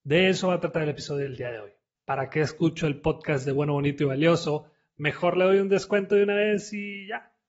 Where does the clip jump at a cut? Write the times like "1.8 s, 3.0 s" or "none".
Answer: 1.9 s